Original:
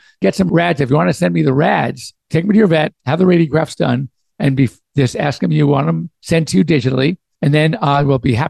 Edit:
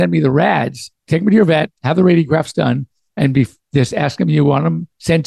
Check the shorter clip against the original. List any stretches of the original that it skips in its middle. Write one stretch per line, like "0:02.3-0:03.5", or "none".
none